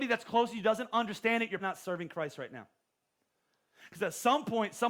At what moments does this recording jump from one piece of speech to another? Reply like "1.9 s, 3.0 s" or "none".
1.6 s